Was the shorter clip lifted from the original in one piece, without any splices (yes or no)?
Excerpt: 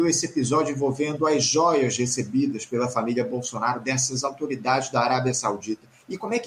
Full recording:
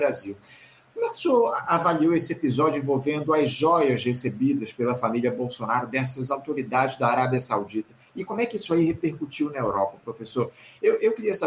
yes